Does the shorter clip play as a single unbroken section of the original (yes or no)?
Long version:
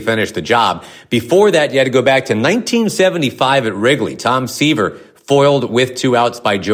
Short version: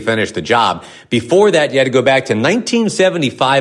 yes